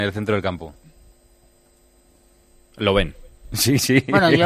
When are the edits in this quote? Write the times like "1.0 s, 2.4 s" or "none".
none